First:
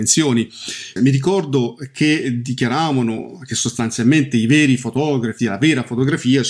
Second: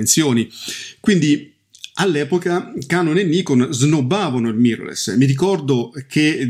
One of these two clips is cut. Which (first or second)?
first